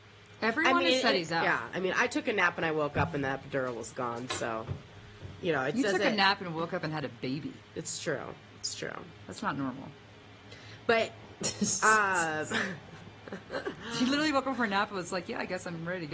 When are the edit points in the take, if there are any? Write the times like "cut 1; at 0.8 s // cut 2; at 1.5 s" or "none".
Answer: none